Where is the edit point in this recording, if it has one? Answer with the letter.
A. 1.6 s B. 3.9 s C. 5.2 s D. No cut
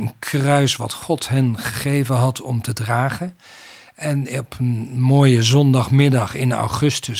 D